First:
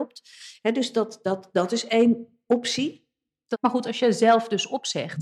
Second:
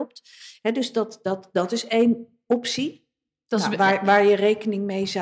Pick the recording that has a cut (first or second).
first